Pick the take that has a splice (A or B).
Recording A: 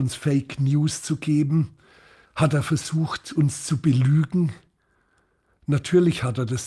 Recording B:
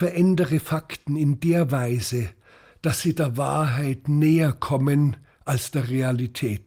A